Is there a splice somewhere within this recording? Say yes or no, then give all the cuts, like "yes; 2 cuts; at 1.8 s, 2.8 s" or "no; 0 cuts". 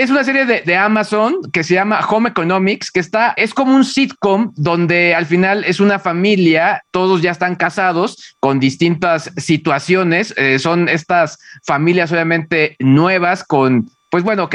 yes; 1 cut; at 3.4 s